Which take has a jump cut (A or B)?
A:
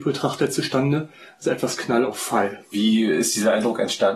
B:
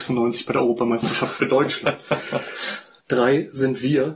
B